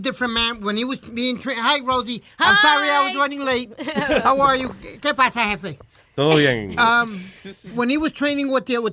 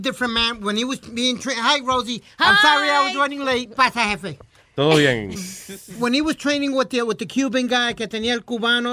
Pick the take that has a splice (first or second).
second